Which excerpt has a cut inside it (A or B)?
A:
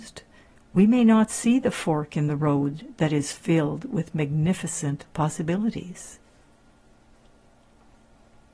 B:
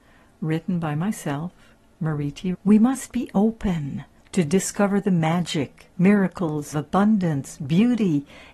B